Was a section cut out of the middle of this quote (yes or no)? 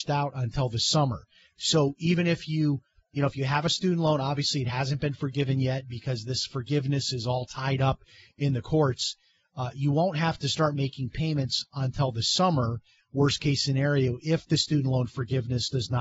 no